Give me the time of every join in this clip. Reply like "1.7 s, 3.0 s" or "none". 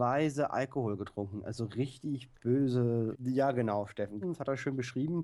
3.1 s, 4.2 s